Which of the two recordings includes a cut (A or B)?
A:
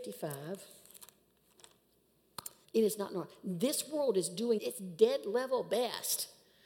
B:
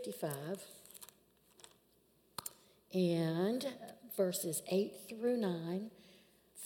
A